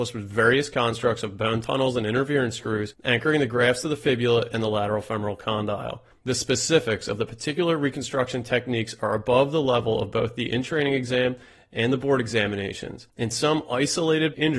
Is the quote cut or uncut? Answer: cut